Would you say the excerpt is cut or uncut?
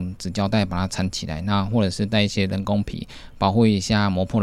uncut